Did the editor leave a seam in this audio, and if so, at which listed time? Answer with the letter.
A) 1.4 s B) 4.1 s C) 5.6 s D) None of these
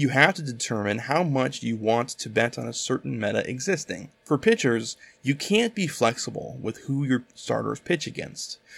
B